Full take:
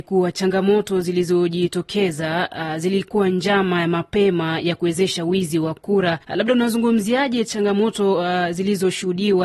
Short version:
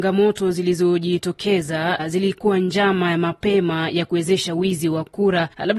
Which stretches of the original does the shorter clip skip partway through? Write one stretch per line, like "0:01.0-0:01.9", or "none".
0:02.5-0:02.7